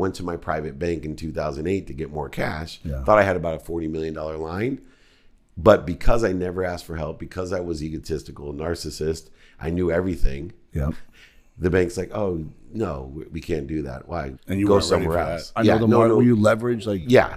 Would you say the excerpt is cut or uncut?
cut